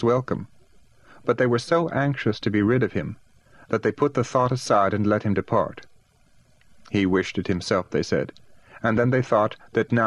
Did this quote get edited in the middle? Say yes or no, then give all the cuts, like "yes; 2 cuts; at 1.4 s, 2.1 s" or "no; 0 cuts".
no; 0 cuts